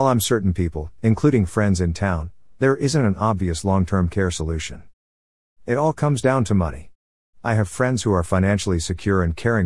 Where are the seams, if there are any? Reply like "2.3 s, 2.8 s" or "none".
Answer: 2.5 s